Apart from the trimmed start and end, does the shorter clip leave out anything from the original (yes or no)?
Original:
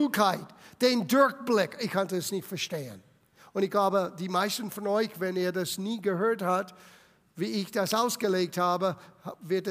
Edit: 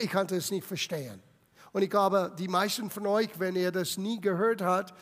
no